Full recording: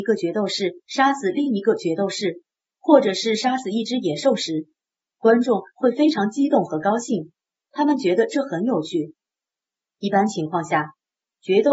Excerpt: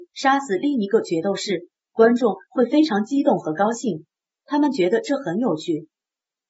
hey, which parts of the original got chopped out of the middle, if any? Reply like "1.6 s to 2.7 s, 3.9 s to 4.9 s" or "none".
2.6 s to 5.1 s